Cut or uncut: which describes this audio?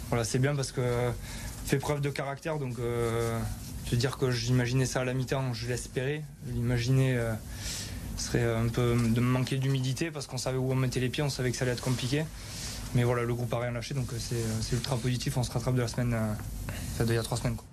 uncut